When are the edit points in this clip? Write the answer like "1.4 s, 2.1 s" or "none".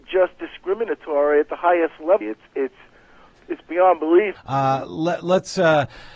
2.2 s, 4.4 s